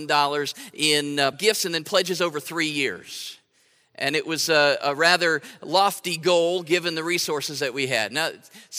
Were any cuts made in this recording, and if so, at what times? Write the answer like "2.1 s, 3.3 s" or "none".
1.3 s